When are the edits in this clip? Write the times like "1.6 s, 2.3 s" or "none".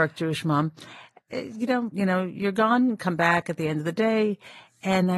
1.9 s